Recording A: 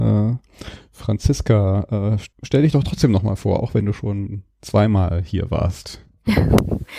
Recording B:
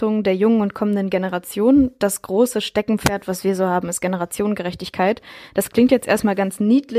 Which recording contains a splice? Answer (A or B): A